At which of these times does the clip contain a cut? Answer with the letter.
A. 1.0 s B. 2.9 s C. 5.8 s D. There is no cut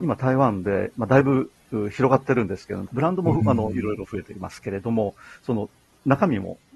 B